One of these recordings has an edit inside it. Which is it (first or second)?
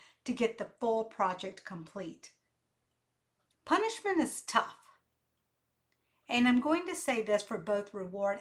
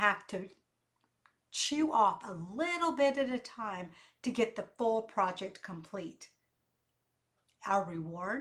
first